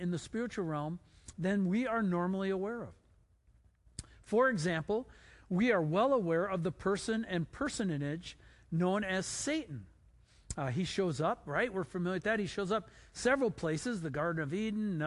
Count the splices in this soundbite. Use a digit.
0